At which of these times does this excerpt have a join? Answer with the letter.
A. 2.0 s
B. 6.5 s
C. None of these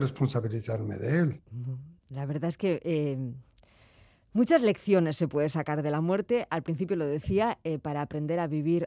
C